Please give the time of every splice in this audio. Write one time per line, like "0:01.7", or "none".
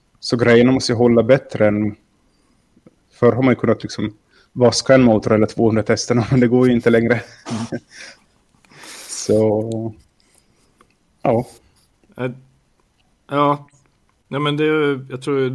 none